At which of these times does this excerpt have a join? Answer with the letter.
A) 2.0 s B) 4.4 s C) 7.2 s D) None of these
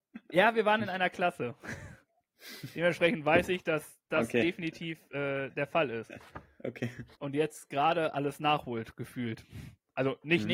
C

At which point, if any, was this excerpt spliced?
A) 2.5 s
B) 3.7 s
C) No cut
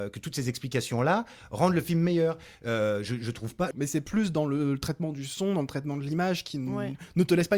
B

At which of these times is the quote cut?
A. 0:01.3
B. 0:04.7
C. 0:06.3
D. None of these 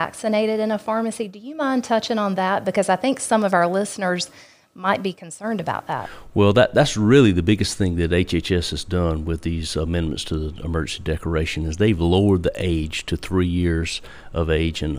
D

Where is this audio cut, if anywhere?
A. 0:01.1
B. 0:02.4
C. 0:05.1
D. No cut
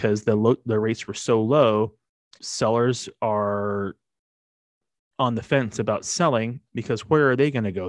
B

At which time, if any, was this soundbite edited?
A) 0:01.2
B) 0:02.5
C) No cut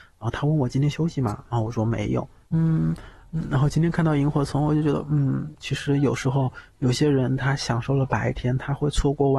B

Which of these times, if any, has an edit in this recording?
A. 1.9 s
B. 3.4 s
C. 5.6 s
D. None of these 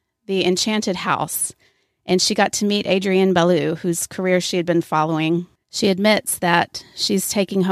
C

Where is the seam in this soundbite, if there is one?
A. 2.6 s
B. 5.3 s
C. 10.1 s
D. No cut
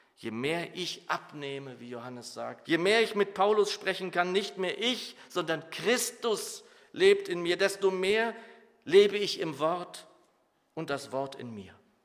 A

